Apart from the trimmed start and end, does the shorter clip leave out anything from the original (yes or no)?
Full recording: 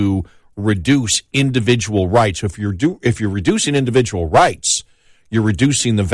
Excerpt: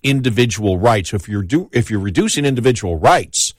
no